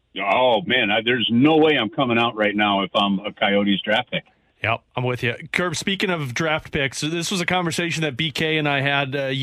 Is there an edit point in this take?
no; 0 cuts

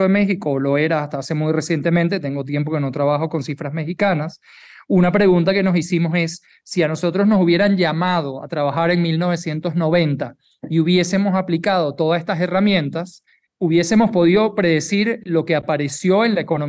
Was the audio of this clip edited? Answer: no; 0 cuts

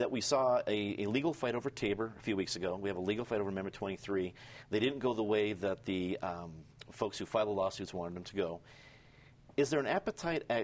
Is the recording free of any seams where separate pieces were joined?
yes; 0 cuts

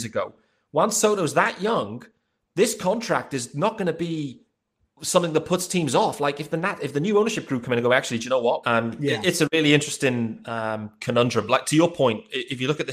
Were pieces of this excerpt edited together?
yes; 1 cut; at 8.6 s

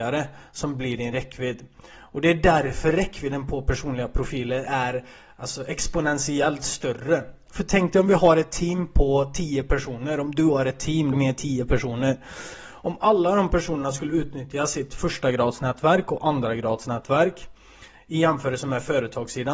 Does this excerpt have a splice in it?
yes; 1 cut; at 11.1 s

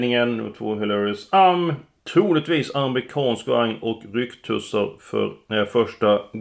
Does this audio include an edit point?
no; 0 cuts

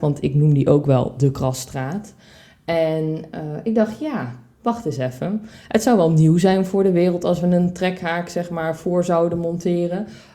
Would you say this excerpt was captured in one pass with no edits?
yes; 0 cuts

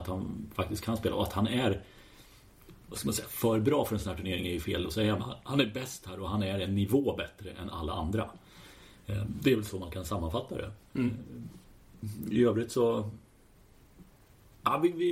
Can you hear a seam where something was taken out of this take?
no; 0 cuts

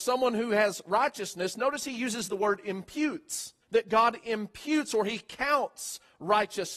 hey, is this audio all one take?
no; 1 cut; at 3.6 s

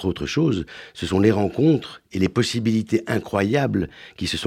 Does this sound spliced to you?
no; 0 cuts

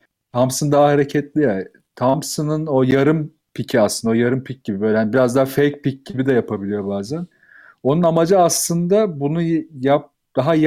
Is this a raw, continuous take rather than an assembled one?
yes; 0 cuts

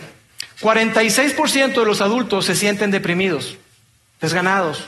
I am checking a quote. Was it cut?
no; 0 cuts

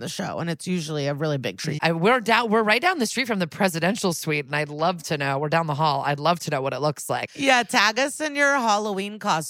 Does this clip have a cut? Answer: yes; 2 cuts; at 1.8 s, 7.3 s

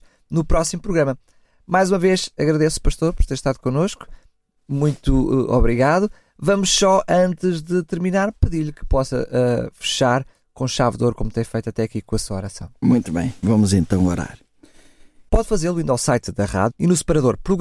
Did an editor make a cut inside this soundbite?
yes; 2 cuts; at 15.3 s, 16.7 s

